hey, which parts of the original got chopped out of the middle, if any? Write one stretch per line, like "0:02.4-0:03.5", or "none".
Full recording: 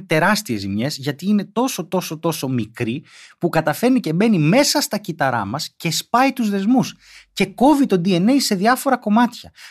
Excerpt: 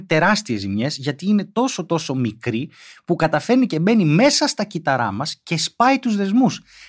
0:01.9-0:02.2